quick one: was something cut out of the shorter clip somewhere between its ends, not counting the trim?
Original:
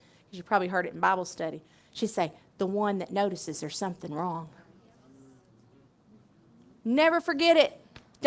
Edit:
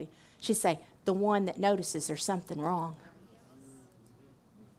no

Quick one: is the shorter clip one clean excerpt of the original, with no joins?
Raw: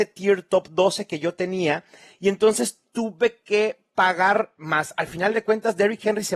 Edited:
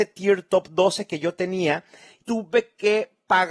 no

